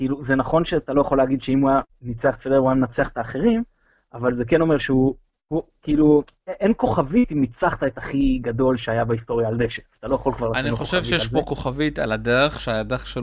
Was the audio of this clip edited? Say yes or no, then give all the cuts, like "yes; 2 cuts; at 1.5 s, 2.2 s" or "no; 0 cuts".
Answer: no; 0 cuts